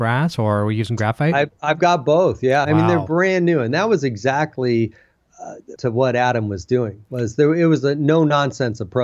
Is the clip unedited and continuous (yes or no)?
no